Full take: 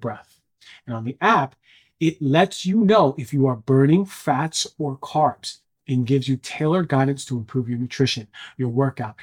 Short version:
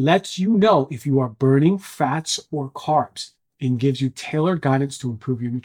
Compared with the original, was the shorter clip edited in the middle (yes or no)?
no